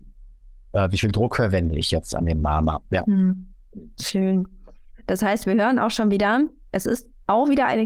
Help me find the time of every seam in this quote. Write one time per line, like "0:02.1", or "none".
0:02.9

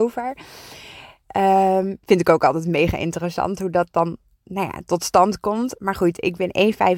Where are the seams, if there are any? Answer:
none

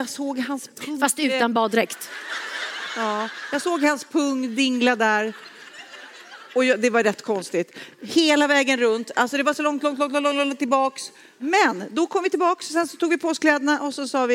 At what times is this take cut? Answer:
none

